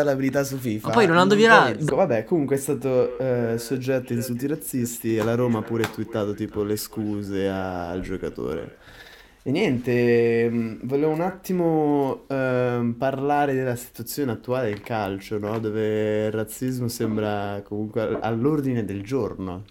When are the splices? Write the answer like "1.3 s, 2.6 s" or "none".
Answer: 1.9 s